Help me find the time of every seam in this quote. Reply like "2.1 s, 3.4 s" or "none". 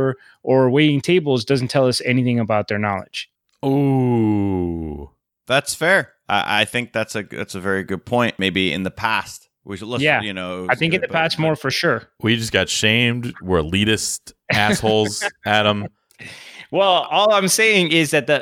none